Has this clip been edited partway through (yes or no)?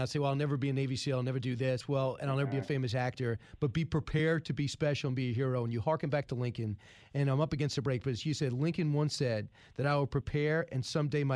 no